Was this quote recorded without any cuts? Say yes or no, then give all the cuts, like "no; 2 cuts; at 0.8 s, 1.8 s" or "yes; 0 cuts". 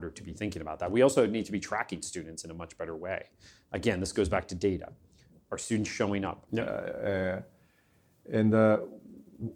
no; 1 cut; at 6.5 s